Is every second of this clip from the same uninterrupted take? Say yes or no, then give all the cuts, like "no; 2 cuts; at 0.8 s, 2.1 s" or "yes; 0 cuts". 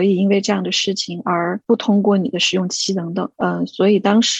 yes; 0 cuts